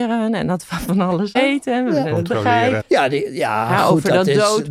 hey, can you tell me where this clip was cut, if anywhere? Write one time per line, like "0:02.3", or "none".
0:01.3
0:02.8

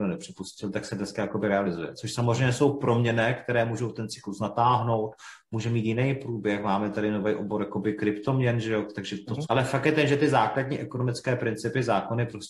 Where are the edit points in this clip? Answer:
0:09.5

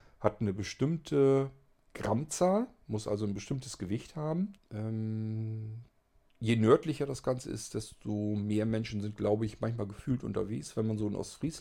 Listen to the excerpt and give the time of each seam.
0:04.6

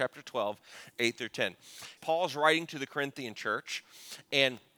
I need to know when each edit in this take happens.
0:02.0

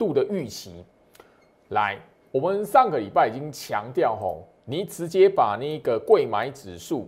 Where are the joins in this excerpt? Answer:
none

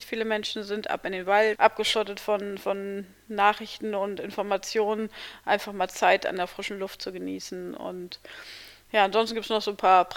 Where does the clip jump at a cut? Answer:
0:01.6

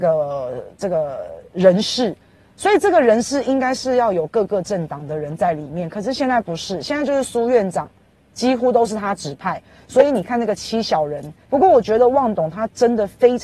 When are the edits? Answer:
0:11.5

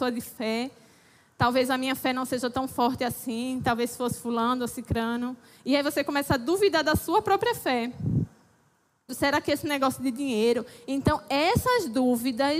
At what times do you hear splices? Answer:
0:09.1

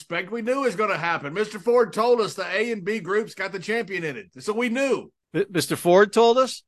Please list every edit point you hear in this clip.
none

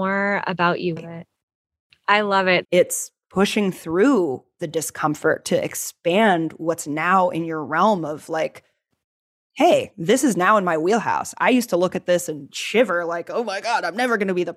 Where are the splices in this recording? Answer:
0:01.0
0:02.6

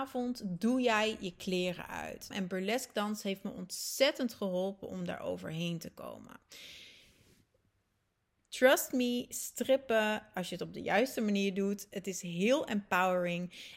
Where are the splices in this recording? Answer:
0:02.3
0:08.4

